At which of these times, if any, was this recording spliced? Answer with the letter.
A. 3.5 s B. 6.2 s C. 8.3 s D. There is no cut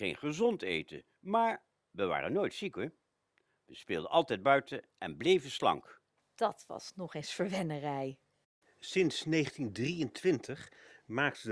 B